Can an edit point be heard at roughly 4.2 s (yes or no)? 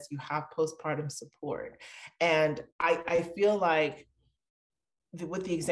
no